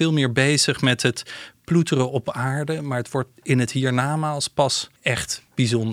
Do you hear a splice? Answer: yes; 1 cut; at 5.0 s

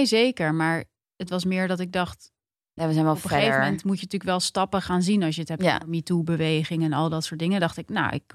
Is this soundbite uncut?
no; 1 cut; at 2.8 s

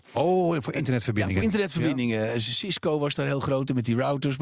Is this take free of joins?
yes; 0 cuts

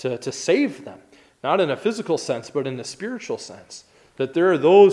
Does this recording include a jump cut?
no; 0 cuts

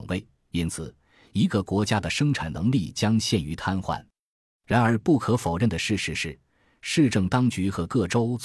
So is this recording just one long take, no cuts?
yes; 0 cuts

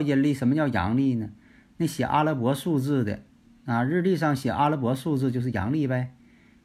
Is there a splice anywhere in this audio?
no; 0 cuts

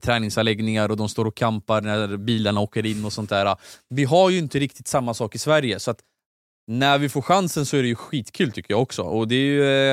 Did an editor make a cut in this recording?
no; 0 cuts

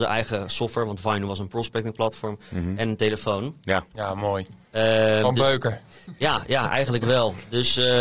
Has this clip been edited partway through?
no; 0 cuts

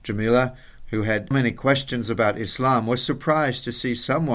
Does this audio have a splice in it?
yes; 1 cut; at 1.3 s

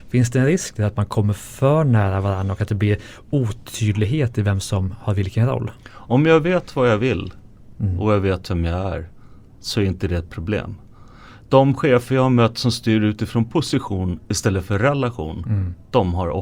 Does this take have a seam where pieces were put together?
no; 0 cuts

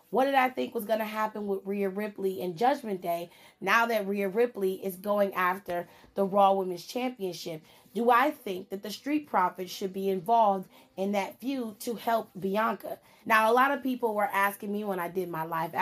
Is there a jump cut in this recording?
yes; 1 cut; at 13.2 s

